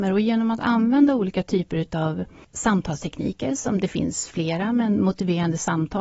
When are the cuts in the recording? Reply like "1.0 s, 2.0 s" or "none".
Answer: none